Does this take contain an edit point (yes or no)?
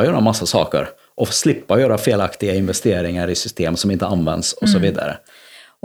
no